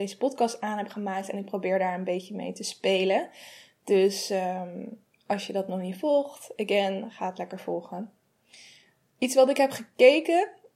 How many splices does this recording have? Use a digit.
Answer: 0